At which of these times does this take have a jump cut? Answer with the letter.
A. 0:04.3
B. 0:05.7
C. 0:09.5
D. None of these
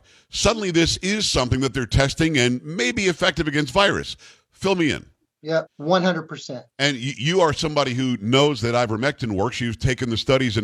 B